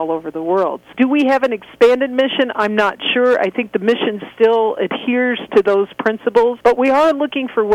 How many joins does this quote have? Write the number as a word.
one